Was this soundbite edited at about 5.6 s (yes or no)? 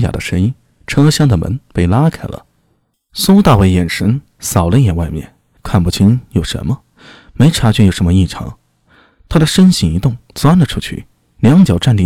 yes